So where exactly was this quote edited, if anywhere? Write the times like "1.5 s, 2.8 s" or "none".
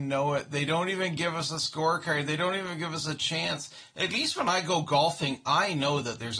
none